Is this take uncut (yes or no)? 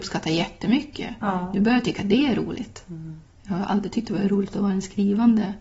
yes